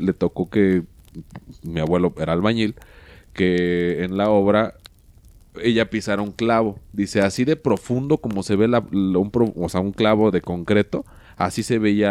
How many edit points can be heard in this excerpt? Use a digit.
0